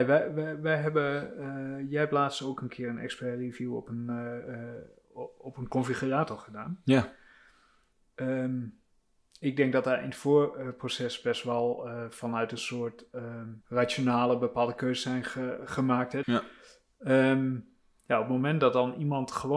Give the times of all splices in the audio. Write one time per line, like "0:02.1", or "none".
0:13.6
0:16.2